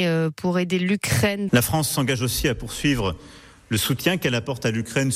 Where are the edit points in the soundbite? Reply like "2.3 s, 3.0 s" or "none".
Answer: 1.5 s

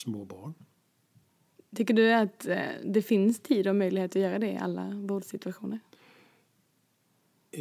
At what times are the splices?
1.6 s

